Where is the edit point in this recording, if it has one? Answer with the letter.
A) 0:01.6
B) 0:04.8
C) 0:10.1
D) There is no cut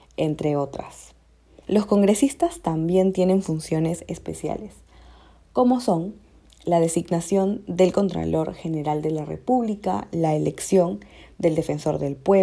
A